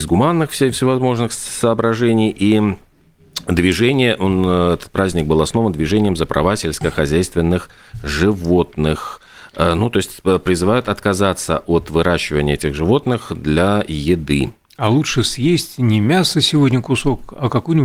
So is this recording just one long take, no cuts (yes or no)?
yes